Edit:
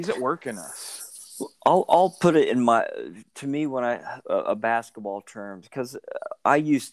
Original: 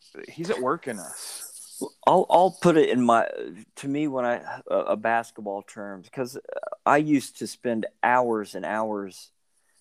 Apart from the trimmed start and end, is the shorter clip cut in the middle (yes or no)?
no